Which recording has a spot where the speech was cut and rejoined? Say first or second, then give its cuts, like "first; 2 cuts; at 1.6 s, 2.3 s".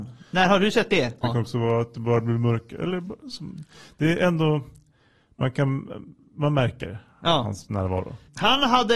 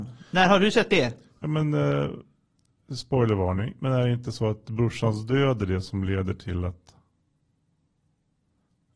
first; 1 cut; at 1.2 s